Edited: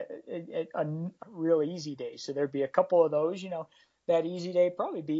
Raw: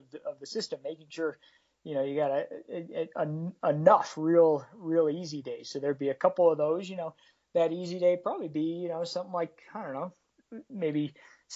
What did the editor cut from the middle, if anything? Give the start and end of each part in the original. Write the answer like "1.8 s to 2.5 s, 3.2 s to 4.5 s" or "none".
3.6 s to 4.7 s